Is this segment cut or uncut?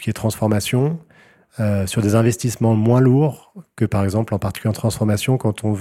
uncut